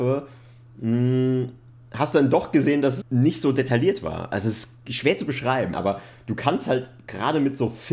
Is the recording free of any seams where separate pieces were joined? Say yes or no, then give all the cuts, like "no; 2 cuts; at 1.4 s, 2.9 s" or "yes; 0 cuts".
no; 2 cuts; at 3.0 s, 5.7 s